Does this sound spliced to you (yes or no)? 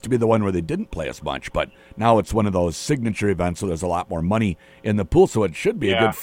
no